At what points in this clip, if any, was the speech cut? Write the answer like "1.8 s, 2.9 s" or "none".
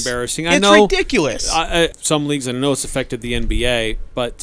1.9 s

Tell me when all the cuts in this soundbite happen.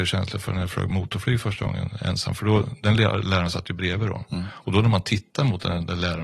none

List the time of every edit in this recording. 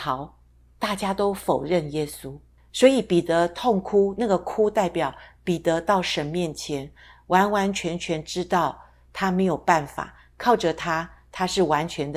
2.7 s

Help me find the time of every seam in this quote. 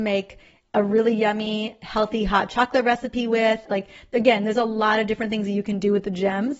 3.7 s

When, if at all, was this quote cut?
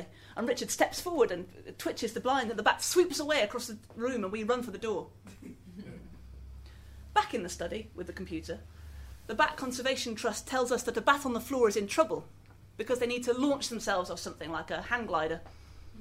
none

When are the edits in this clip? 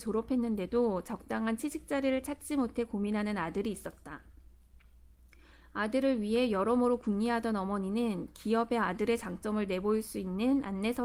none

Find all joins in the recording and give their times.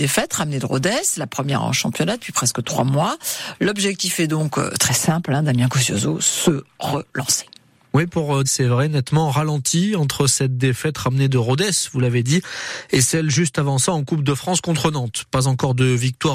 8.4 s

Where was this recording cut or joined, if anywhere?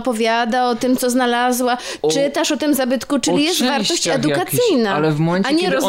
none

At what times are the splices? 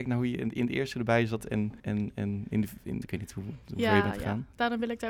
1.8 s, 3.0 s

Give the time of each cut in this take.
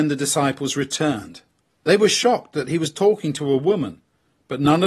none

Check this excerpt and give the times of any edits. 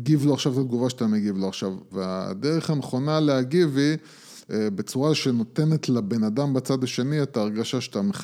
1.9 s

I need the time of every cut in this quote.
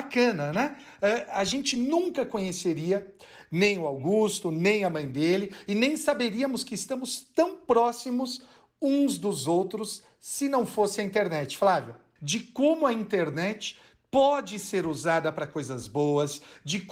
12.2 s

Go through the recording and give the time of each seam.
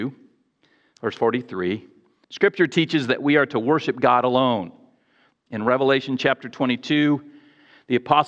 2.2 s, 5.3 s

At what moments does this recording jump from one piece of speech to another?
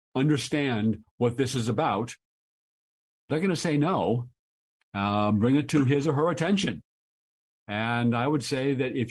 4.8 s

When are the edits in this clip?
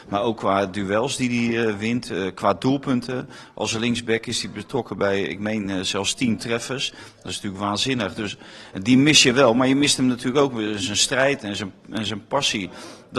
none

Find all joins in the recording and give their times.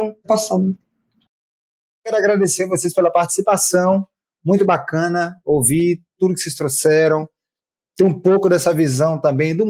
none

